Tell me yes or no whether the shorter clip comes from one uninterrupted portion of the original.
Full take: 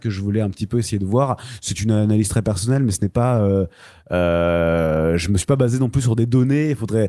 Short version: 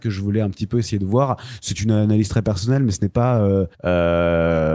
no